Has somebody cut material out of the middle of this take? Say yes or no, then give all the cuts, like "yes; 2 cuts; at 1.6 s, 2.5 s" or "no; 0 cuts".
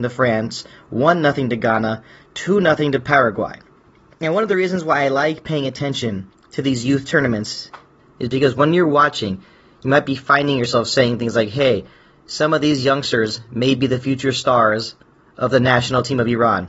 no; 0 cuts